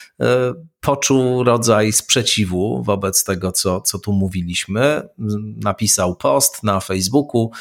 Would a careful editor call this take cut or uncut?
uncut